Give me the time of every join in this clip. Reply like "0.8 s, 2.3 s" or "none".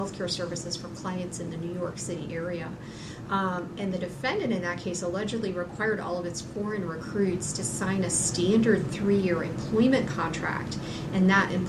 3.3 s